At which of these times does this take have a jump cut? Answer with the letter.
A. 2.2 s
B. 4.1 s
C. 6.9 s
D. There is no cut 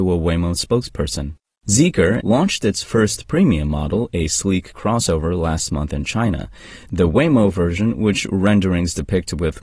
A